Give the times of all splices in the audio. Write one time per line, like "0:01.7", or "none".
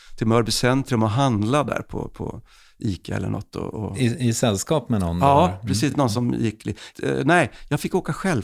none